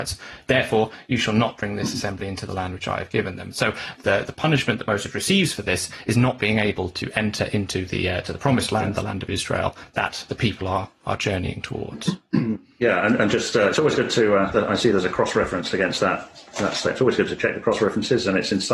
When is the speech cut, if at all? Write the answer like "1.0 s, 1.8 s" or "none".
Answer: none